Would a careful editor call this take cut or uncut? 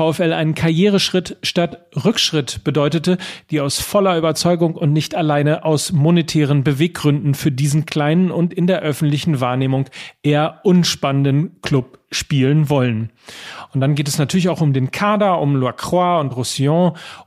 uncut